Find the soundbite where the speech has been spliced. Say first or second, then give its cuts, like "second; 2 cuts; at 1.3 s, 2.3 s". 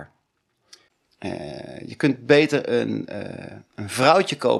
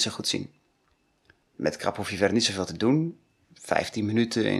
second; 1 cut; at 1.4 s